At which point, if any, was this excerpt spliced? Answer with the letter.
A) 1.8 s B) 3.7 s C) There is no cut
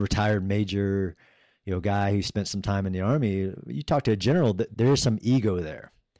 C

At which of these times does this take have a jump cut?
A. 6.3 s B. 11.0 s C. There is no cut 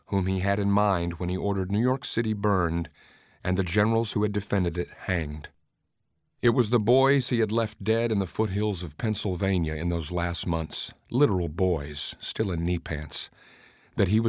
B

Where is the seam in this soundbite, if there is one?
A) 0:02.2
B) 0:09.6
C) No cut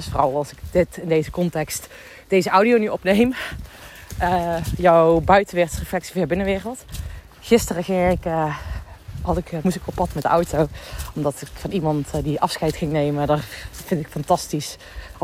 B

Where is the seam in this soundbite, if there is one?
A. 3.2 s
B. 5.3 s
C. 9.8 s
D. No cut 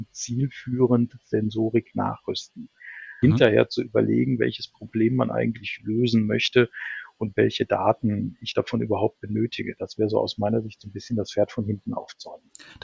A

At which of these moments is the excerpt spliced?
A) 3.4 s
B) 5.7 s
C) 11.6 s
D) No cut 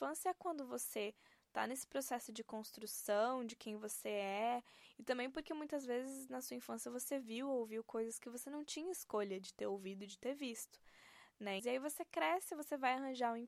C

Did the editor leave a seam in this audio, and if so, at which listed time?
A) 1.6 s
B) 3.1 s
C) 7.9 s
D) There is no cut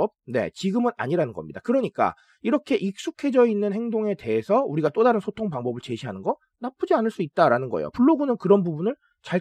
D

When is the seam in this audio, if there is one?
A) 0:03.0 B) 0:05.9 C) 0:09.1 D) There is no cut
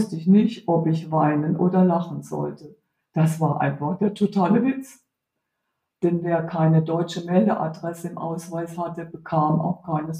B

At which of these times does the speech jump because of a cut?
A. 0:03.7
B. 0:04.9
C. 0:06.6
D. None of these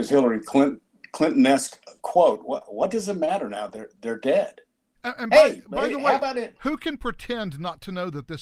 B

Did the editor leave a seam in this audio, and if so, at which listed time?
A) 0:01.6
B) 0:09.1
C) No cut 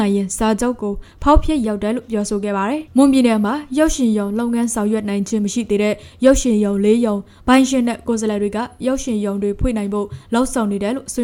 A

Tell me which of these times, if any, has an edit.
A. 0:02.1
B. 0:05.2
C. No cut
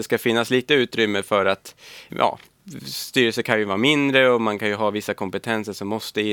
A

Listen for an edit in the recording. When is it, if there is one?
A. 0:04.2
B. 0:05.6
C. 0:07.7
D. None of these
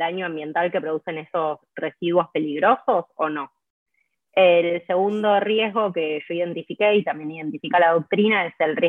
A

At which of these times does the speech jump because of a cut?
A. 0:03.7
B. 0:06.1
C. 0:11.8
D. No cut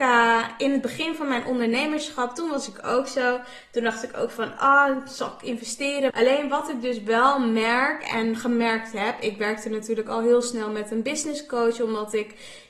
B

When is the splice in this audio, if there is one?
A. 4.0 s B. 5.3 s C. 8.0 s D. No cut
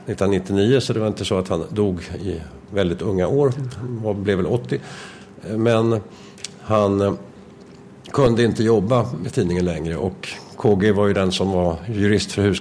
D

